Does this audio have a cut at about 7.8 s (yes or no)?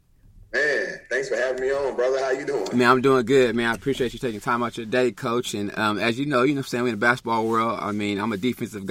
no